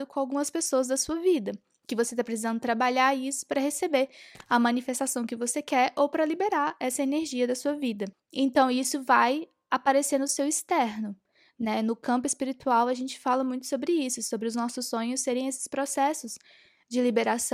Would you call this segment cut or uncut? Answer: cut